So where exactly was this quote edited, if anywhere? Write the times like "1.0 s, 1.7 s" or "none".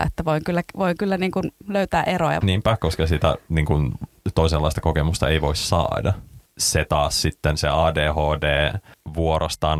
2.4 s, 6.5 s